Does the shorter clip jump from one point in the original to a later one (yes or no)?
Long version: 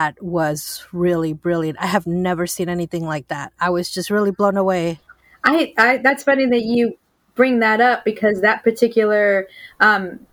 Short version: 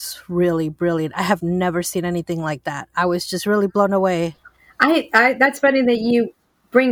no